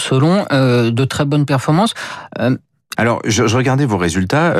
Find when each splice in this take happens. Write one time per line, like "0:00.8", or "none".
0:02.9